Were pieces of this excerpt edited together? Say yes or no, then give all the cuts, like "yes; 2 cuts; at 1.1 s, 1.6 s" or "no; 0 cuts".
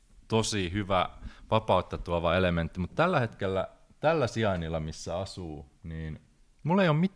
no; 0 cuts